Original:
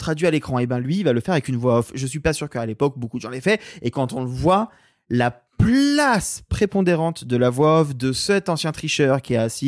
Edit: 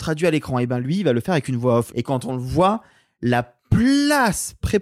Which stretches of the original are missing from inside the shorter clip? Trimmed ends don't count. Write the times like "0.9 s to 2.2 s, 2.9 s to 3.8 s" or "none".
1.9 s to 3.8 s